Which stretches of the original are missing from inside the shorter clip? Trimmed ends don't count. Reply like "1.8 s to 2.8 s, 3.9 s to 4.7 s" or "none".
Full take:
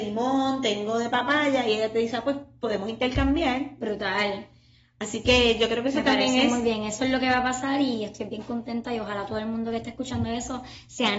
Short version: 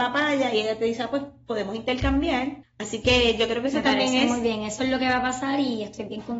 3.8 s to 4.8 s